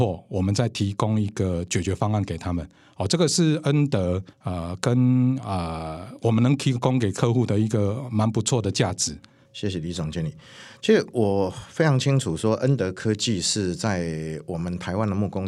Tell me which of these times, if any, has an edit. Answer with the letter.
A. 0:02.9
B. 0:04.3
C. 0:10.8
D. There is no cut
B